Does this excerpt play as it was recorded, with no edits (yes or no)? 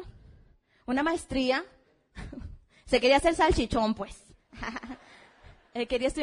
yes